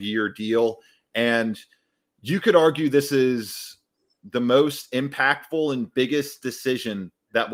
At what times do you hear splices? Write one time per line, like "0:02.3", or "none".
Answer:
none

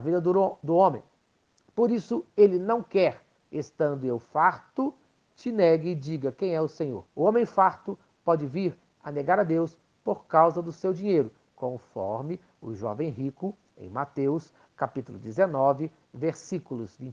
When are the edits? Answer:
0:07.1

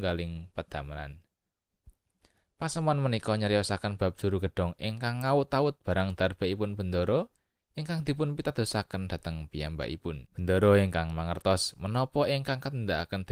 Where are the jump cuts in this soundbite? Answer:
0:10.3

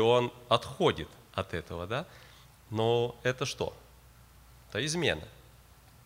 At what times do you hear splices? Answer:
none

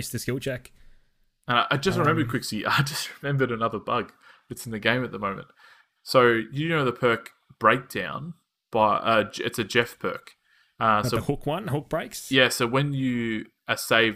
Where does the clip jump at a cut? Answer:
0:06.0

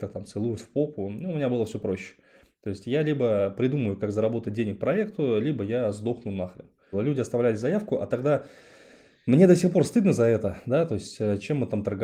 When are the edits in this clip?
0:06.9

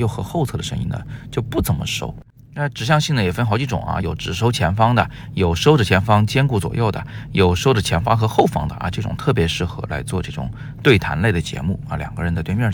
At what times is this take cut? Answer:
none

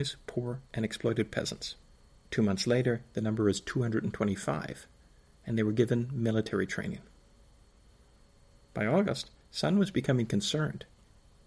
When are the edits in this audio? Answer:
0:02.1

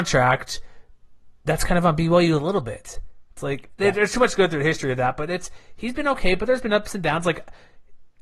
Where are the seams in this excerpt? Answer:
none

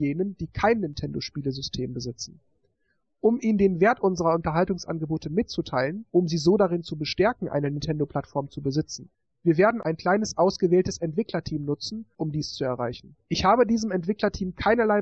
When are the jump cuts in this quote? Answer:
none

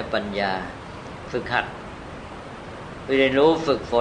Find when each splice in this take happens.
none

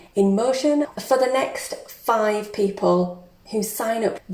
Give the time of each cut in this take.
0:00.9

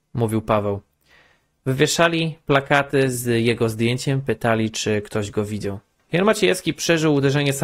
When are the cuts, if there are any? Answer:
0:06.0

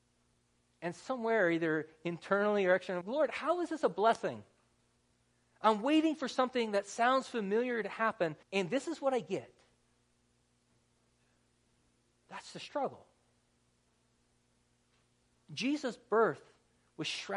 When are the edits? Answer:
0:03.0
0:08.4

